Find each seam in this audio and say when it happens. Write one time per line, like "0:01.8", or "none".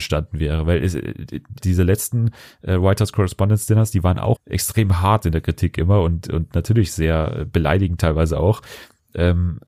0:01.6
0:04.3